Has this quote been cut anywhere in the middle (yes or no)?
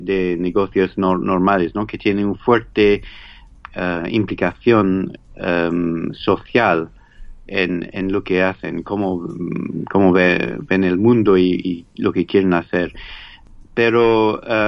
no